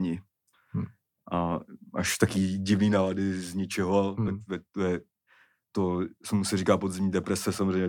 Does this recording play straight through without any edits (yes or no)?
yes